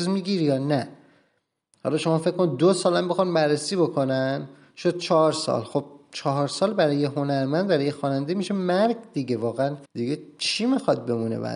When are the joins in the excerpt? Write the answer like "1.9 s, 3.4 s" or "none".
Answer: 9.9 s